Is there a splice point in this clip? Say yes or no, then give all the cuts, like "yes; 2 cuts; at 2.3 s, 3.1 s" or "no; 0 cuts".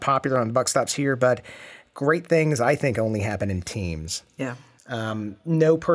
no; 0 cuts